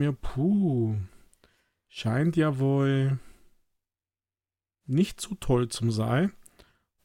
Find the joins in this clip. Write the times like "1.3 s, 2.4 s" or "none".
none